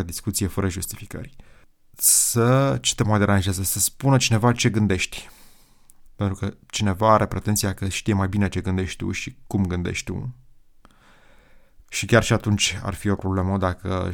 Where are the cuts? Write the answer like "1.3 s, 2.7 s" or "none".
6.1 s, 11.8 s